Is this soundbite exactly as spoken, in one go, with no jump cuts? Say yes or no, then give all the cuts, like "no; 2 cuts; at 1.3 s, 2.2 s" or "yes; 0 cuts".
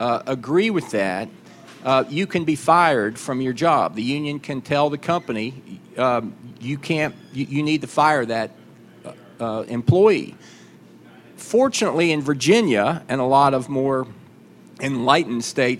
yes; 0 cuts